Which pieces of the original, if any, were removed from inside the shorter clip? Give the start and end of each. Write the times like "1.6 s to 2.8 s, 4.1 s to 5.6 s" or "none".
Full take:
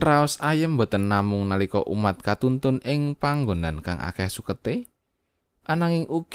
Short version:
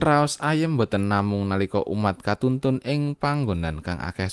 none